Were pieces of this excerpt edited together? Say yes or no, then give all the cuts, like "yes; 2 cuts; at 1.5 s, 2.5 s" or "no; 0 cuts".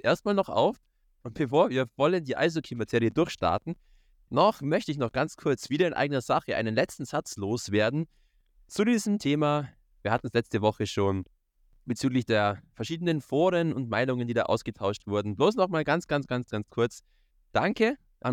no; 0 cuts